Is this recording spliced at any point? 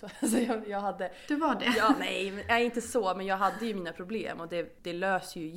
no; 0 cuts

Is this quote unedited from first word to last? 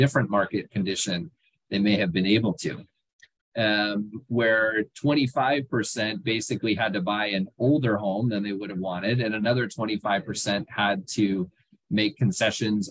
no; 1 cut; at 3.4 s

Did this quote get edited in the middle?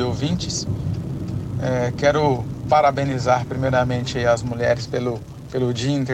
no; 0 cuts

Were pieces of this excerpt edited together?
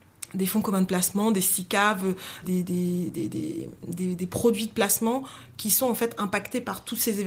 yes; 1 cut; at 2.4 s

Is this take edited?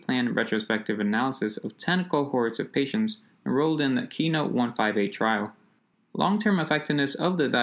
yes; 1 cut; at 5.9 s

